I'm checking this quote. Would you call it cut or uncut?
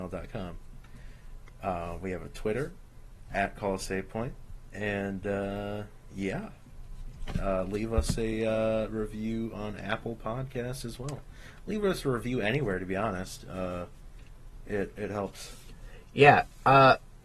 uncut